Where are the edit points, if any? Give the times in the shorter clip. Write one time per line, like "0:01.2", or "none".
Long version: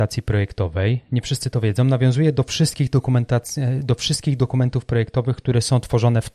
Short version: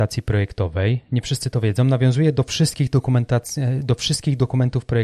none